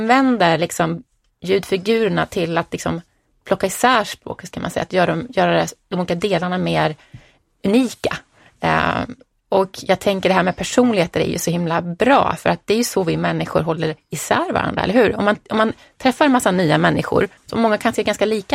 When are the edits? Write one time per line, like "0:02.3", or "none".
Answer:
0:17.4

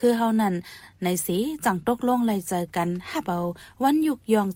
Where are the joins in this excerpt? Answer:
none

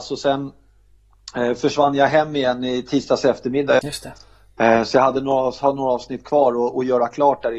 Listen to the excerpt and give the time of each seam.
0:03.8

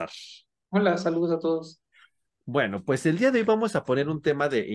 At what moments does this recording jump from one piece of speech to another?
none

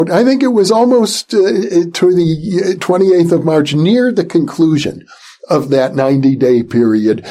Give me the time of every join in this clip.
none

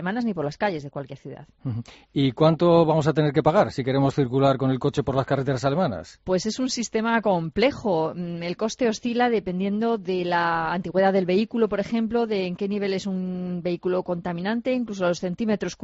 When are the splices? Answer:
none

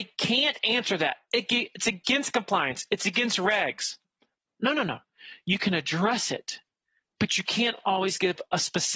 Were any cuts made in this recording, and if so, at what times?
none

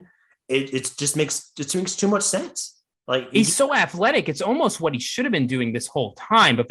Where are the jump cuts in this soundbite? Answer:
none

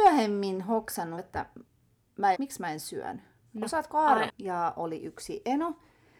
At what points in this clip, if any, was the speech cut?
0:01.2
0:02.3
0:04.3

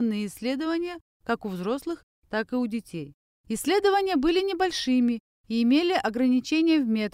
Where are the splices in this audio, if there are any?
0:03.4

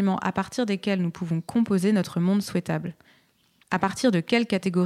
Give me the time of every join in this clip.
0:03.6

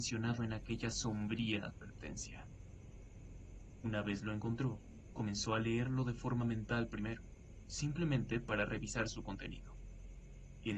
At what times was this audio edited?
none

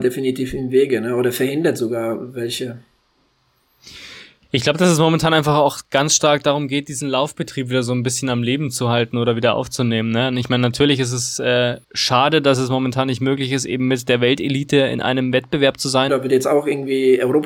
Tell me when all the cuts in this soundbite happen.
0:11.8
0:16.1

